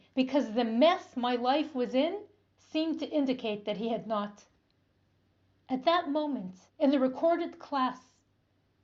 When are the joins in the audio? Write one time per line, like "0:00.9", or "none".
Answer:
0:06.7